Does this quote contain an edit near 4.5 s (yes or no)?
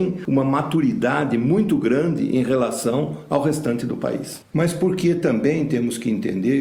yes